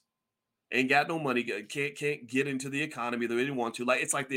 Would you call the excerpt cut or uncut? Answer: uncut